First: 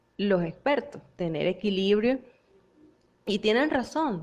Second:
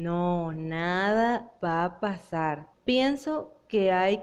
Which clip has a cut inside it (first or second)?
second